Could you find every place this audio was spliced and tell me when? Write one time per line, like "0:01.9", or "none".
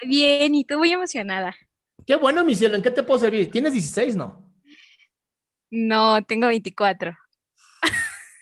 none